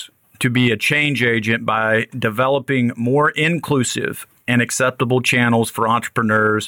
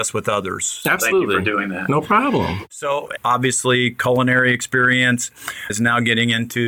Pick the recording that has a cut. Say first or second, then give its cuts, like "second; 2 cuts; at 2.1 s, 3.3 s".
second; 2 cuts; at 3.2 s, 5.7 s